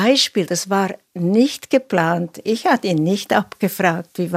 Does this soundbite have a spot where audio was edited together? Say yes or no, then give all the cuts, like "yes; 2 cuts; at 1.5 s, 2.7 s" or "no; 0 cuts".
no; 0 cuts